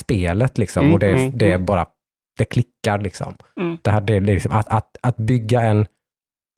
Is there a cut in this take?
yes; 1 cut; at 3.8 s

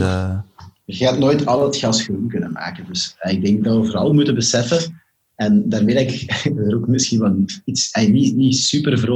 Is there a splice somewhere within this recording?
no; 0 cuts

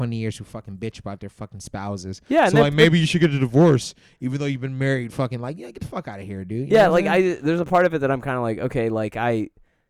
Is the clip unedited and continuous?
yes; 0 cuts

